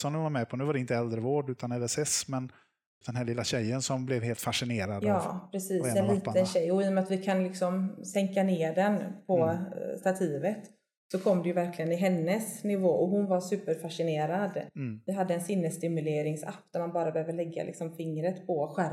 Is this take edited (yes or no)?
yes